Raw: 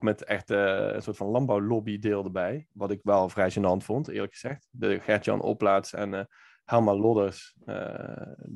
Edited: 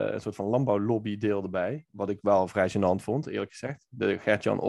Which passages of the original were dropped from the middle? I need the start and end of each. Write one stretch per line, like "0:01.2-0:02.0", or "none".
none